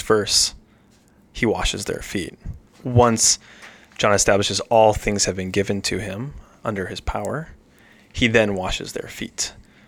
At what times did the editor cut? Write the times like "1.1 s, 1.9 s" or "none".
2.7 s